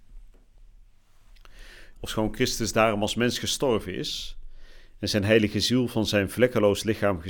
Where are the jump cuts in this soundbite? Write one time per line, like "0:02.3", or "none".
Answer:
0:01.9